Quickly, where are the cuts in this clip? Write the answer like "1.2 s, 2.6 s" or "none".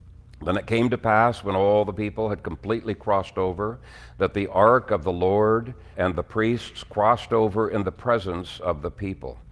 5.9 s